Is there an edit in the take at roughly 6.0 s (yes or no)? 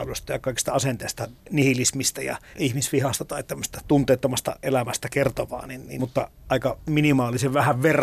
yes